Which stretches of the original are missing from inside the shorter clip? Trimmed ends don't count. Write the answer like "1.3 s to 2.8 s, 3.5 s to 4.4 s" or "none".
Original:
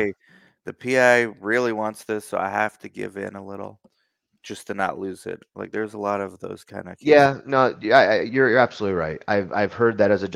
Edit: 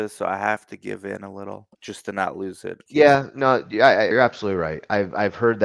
3.9 s to 4.4 s, 5.5 s to 7.0 s, 8.2 s to 8.5 s